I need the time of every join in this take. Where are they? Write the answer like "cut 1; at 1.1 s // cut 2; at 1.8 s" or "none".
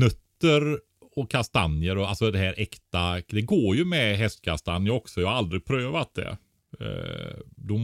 none